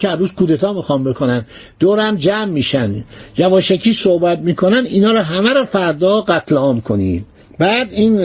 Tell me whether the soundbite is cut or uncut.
uncut